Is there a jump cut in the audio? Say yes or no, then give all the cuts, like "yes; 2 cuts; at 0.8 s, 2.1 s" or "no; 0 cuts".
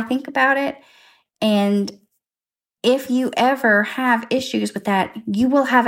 no; 0 cuts